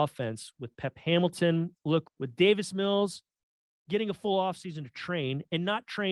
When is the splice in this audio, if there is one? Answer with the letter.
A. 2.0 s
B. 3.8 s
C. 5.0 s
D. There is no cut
A